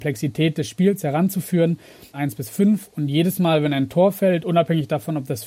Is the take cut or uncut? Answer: cut